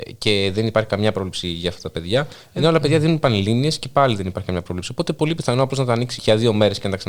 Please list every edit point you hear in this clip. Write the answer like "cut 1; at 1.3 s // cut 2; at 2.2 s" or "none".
cut 1; at 6.2 s